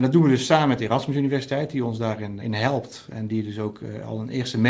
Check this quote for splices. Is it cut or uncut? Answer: cut